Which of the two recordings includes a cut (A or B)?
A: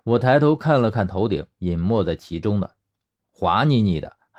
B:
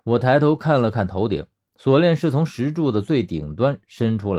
A